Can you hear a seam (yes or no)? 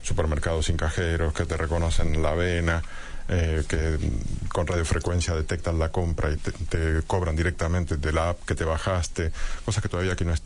yes